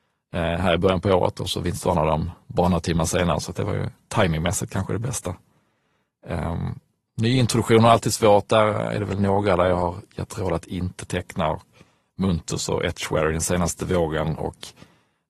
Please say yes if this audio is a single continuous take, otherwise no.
yes